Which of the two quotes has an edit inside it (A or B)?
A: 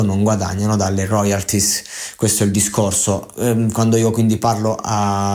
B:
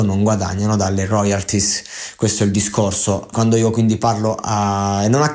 B